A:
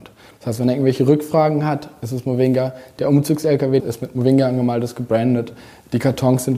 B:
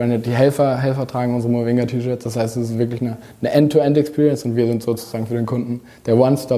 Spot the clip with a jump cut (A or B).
A